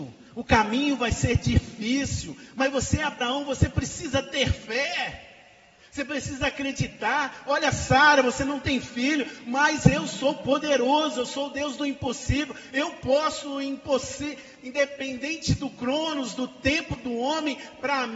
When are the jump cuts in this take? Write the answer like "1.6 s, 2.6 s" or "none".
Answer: none